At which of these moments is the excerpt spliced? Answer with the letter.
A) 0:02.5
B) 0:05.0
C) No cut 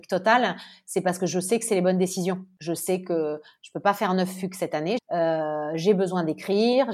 B